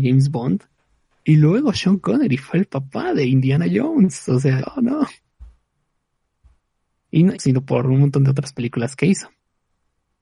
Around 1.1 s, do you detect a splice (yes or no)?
no